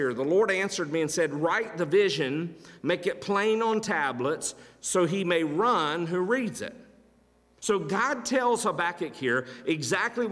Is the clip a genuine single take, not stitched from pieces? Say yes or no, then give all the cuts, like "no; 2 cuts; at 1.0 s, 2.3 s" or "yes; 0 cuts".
no; 1 cut; at 7.6 s